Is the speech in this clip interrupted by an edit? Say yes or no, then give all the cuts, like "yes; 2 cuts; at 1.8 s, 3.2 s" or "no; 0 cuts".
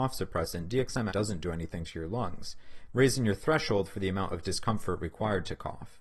yes; 2 cuts; at 1.1 s, 2.9 s